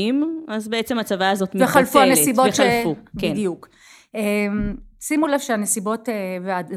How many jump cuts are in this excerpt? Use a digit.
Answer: 0